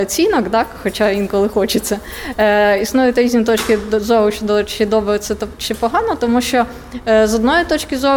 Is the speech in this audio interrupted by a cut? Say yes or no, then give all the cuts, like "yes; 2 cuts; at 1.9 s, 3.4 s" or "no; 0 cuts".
no; 0 cuts